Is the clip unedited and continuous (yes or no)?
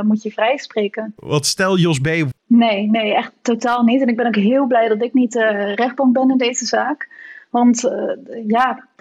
no